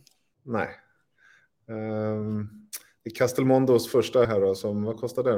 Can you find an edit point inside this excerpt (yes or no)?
yes